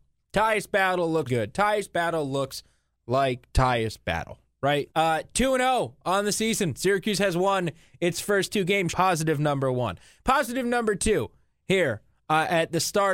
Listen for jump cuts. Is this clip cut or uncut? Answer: cut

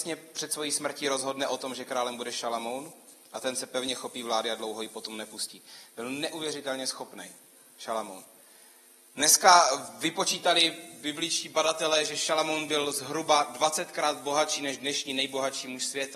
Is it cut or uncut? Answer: uncut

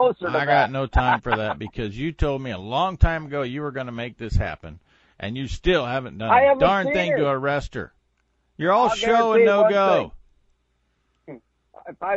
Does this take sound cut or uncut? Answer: uncut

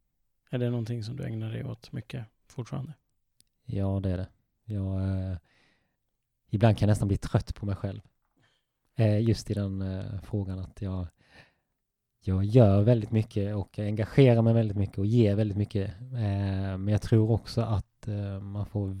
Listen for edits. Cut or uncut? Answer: uncut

